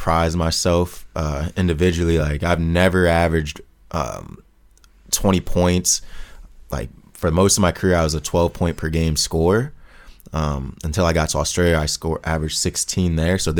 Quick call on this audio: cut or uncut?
uncut